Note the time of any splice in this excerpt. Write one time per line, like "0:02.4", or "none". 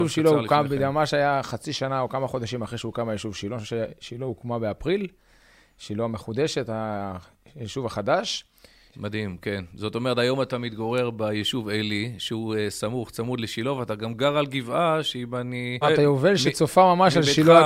0:08.9
0:15.8